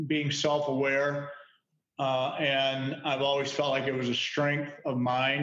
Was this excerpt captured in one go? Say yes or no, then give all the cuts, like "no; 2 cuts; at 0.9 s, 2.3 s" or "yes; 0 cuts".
yes; 0 cuts